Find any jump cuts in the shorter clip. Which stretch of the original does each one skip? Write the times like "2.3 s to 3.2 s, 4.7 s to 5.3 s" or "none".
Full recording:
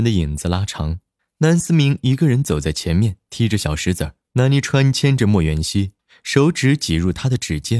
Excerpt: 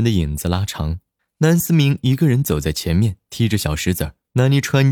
none